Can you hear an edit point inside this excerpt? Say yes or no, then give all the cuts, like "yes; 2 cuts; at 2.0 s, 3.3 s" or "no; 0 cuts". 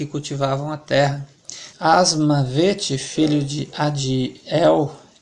yes; 1 cut; at 1.7 s